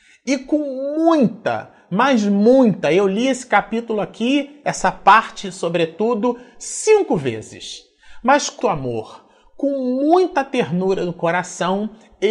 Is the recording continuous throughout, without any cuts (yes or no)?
no